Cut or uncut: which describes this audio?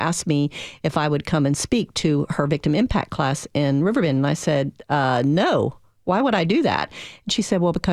uncut